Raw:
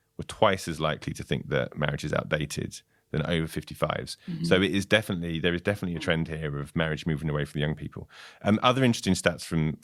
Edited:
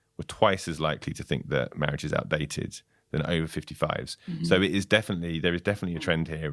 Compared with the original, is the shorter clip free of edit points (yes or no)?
yes